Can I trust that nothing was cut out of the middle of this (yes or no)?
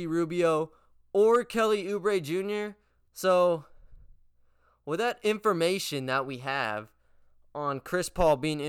no